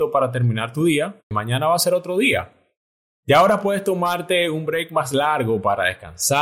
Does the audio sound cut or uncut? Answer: cut